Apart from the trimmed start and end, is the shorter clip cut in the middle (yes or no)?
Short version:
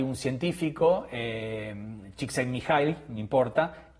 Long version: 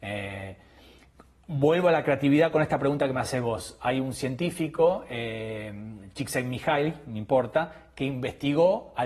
no